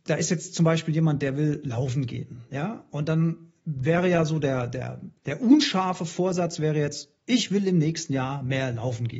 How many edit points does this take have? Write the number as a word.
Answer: zero